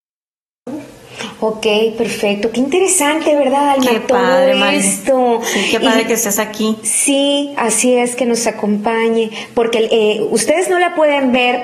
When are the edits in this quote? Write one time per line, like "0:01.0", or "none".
none